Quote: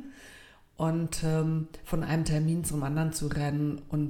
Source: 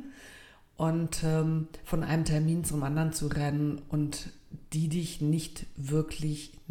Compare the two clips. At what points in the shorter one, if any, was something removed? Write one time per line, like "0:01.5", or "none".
none